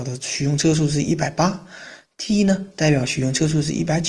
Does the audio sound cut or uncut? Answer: uncut